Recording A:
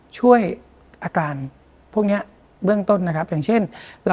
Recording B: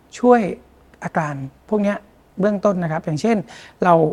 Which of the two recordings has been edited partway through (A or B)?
B